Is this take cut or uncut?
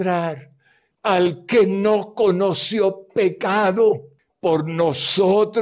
cut